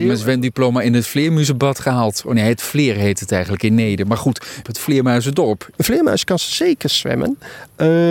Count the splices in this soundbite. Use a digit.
2